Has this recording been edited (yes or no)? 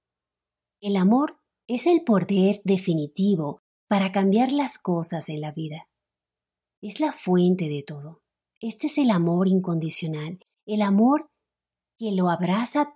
yes